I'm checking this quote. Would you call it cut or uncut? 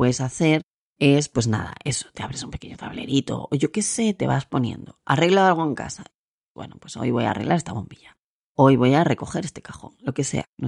uncut